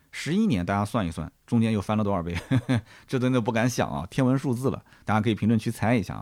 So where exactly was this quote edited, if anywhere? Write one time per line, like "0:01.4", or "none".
none